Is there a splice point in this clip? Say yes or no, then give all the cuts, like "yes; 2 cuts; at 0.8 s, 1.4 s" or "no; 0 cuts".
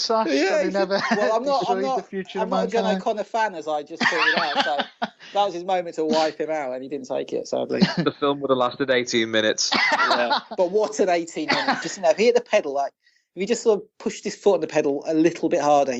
yes; 1 cut; at 11.8 s